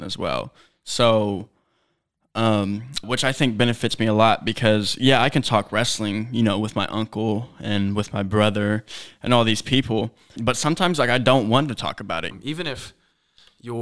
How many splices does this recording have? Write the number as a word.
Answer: three